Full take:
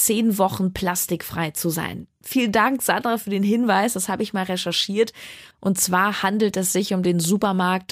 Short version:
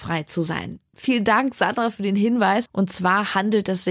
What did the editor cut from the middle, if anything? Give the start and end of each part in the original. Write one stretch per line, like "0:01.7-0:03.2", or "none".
0:03.9-0:05.5